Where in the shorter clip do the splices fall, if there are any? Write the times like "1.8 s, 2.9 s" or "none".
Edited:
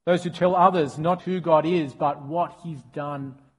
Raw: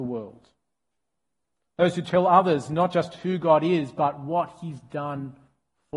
1.2 s

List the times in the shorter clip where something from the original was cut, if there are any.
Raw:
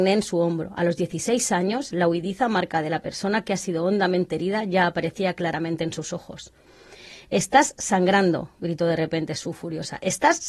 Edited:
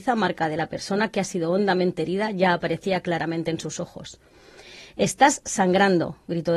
none

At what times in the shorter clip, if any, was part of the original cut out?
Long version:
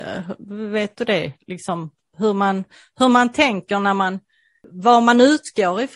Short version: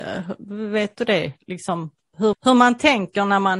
2.3 s

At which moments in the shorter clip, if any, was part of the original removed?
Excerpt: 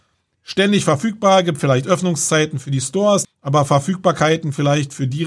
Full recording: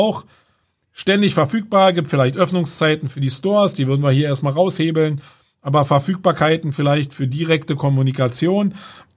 3.2 s

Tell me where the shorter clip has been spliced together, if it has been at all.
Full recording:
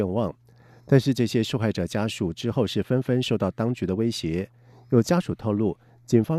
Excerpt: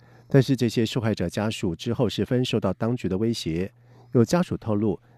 2.3 s

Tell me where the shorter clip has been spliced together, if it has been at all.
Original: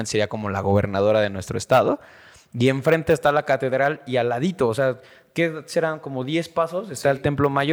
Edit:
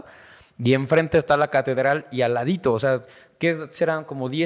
none

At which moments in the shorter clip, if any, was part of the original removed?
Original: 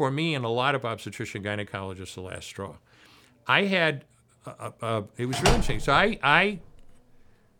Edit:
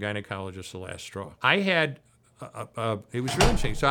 1.4 s

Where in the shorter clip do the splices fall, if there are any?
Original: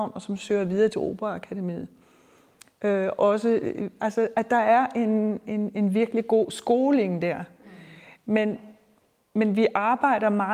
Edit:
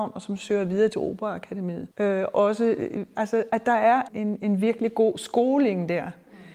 1.9 s, 4.1 s

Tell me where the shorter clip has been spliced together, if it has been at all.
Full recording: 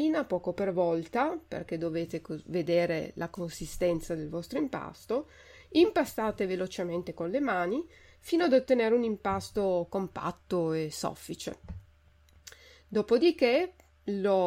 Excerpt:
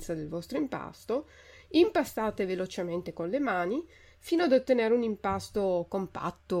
none

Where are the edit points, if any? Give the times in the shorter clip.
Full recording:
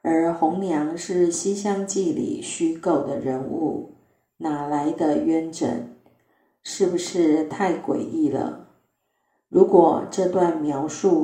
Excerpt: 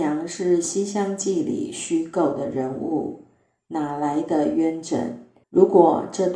5.4 s

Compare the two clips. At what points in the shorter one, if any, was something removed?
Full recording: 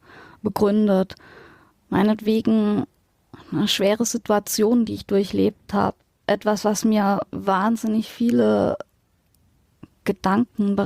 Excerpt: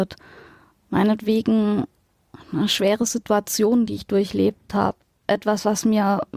none

